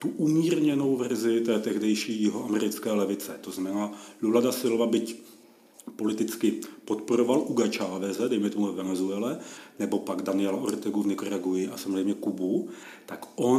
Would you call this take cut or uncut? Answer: uncut